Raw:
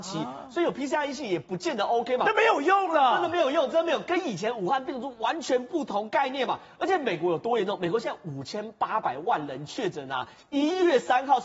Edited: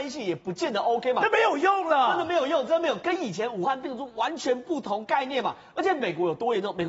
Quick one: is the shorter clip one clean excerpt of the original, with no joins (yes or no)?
yes